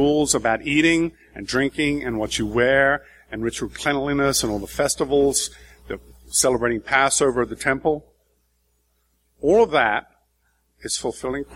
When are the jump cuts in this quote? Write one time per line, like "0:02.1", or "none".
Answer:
none

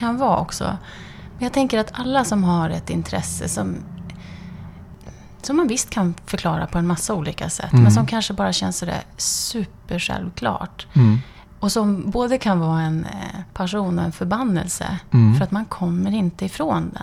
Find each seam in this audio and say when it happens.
0:13.5

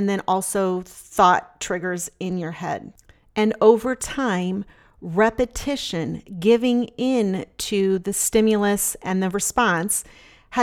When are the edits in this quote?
none

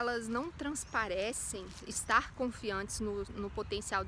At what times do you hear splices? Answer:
0:01.8

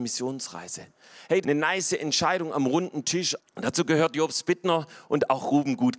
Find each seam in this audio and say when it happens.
0:01.4
0:03.4

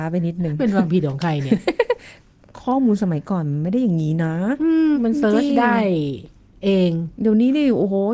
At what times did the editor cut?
0:04.9

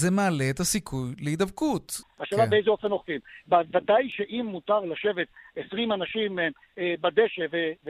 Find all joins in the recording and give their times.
0:02.0

